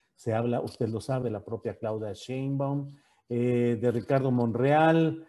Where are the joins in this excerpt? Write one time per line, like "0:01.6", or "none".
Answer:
0:01.2